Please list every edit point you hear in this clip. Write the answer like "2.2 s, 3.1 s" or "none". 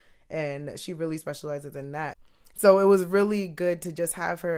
2.1 s